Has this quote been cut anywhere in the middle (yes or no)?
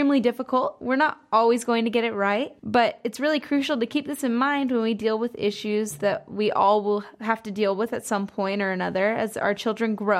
yes